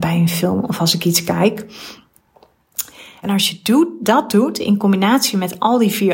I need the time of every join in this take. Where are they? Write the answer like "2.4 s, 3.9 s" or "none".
3.2 s